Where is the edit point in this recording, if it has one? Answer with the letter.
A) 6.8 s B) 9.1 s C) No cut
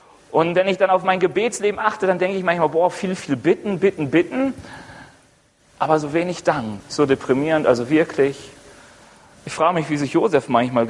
A